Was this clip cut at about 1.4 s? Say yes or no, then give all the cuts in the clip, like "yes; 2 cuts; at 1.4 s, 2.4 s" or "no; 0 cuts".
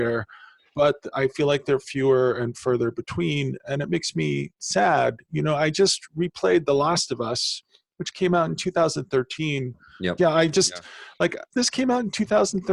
no; 2 cuts; at 10.2 s, 11.5 s